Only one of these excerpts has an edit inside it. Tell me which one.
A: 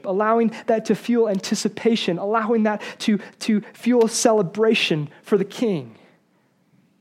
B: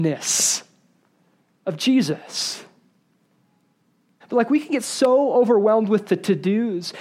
B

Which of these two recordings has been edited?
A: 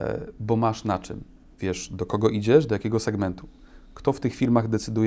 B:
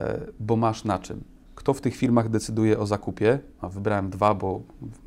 B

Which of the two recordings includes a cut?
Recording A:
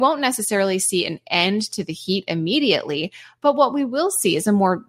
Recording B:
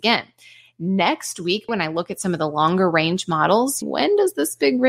B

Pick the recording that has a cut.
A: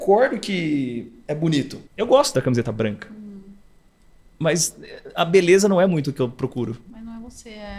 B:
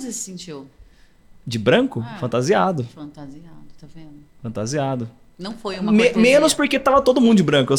A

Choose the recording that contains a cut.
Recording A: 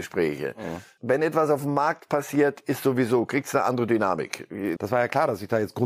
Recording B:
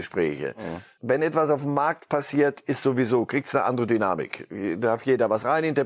A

